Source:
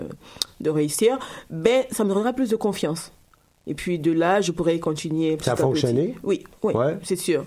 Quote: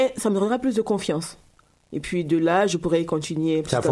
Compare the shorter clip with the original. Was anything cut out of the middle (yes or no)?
no